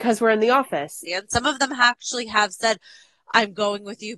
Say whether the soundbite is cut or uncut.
cut